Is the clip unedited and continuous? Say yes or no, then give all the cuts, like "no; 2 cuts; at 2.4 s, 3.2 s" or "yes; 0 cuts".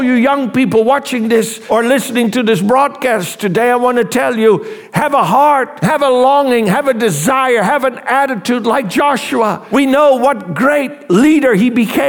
yes; 0 cuts